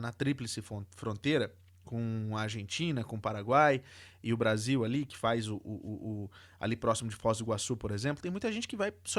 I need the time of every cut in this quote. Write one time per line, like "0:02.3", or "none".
none